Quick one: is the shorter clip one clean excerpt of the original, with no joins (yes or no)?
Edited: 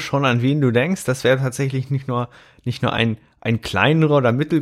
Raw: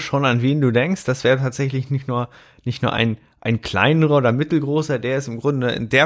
yes